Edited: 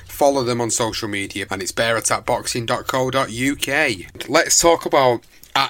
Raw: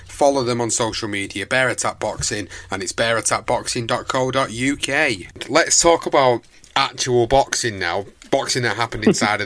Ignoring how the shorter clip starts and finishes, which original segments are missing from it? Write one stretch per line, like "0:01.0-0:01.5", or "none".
0:01.5-0:02.7